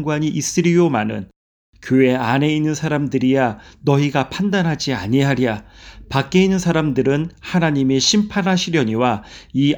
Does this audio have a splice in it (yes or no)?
no